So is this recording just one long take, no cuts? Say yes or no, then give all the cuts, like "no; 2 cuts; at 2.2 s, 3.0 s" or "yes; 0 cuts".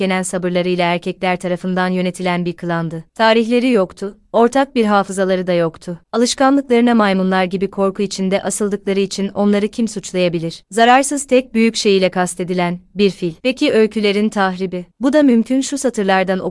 no; 1 cut; at 13.4 s